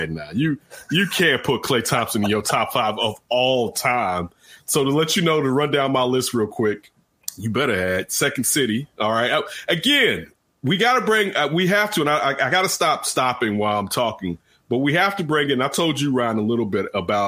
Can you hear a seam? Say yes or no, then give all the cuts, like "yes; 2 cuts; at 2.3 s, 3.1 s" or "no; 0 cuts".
no; 0 cuts